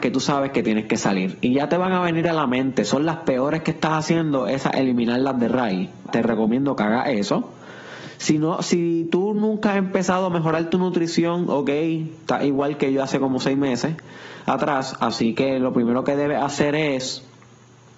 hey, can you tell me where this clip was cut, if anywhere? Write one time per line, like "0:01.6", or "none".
0:06.1

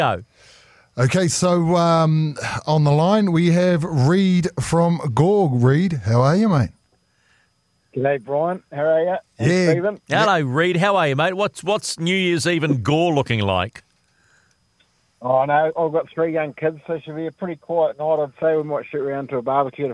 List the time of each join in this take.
none

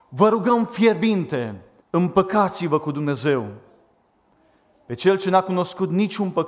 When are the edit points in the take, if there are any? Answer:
0:01.8

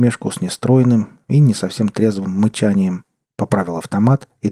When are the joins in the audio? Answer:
0:03.2

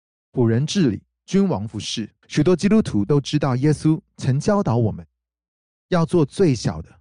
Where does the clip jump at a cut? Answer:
0:02.2

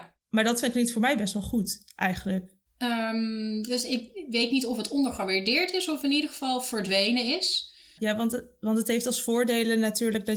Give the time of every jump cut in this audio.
0:02.7
0:08.0

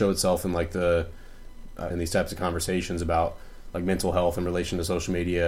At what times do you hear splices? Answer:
0:01.9

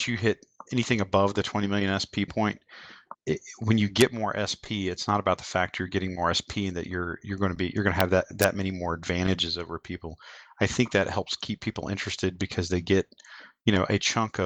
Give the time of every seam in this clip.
0:03.1

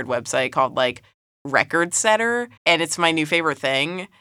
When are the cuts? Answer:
0:02.6

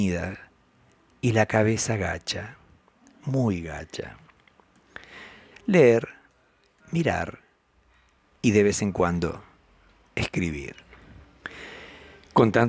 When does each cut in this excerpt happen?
0:05.5

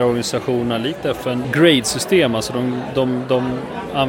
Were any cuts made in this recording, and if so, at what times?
0:01.4

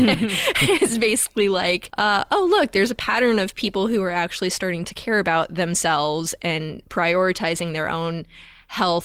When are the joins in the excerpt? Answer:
none

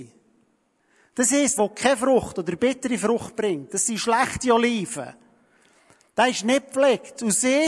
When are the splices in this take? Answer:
0:01.6

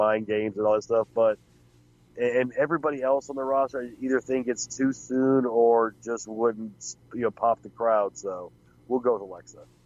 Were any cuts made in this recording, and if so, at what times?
none

